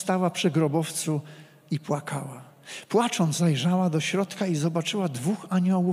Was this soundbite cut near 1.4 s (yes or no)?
no